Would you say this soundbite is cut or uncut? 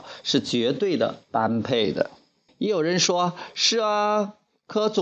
cut